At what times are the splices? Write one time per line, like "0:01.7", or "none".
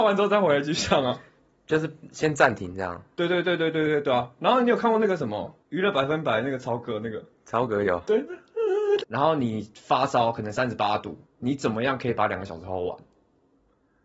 0:05.6
0:09.0
0:11.2